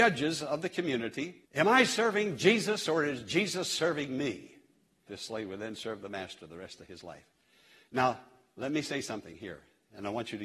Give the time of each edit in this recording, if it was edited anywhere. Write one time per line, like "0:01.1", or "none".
0:01.4
0:05.1

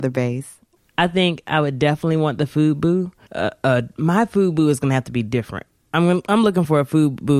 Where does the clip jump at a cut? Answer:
0:03.3

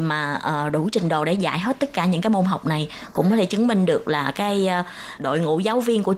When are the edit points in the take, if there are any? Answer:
0:05.2

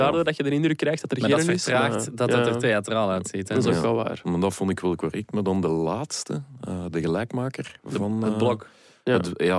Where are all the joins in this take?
none

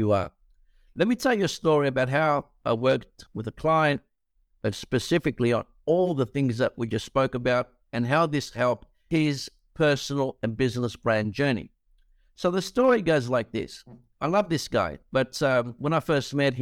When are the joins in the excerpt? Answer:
none

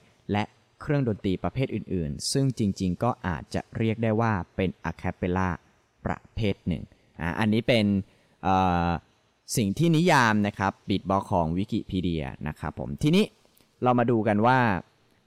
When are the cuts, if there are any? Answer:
none

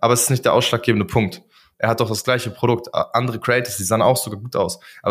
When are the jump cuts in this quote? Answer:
0:01.7

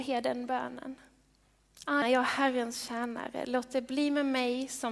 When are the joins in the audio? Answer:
0:02.0

